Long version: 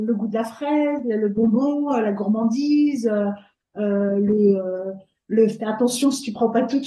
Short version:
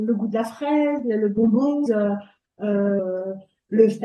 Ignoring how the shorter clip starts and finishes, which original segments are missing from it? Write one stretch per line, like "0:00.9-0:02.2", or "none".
0:01.9-0:03.0
0:04.1-0:04.6